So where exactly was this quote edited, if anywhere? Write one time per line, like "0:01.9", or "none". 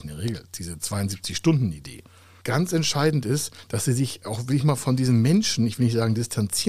none